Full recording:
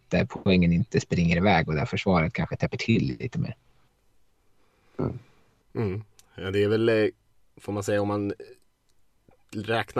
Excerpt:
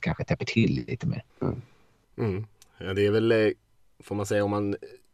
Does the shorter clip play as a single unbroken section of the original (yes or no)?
no